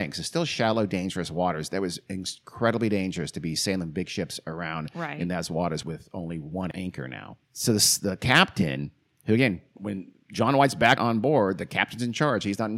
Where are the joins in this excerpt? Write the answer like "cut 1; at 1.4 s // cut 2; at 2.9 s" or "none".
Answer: cut 1; at 7.4 s // cut 2; at 11.0 s

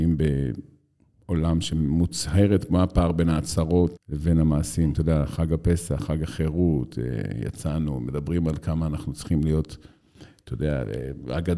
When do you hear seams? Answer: cut 1; at 4.0 s

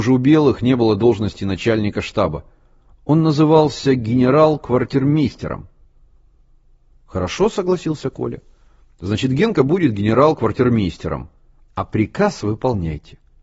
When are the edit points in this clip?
none

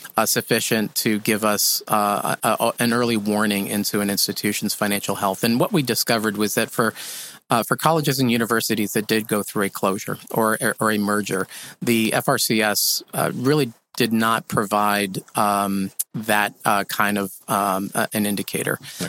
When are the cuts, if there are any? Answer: none

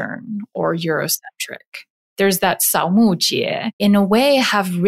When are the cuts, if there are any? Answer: cut 1; at 2.1 s // cut 2; at 3.8 s

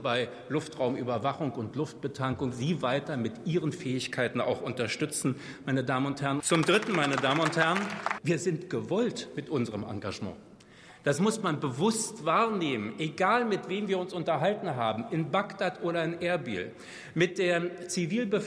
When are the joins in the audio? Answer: cut 1; at 6.4 s // cut 2; at 8.2 s

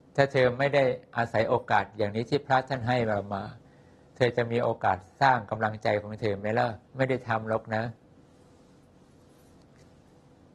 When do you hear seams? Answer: cut 1; at 6.9 s

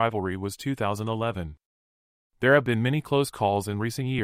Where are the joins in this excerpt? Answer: none

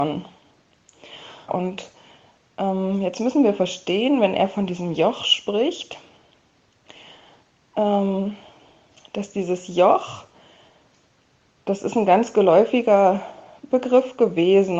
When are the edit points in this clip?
cut 1; at 1.5 s

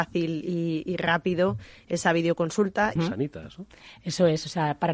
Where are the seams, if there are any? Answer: cut 1; at 3.0 s

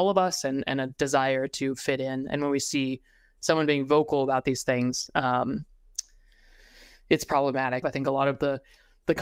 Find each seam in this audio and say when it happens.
cut 1; at 7.8 s

